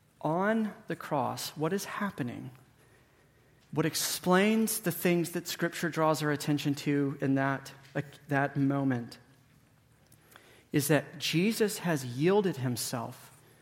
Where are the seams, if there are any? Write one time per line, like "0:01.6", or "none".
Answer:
none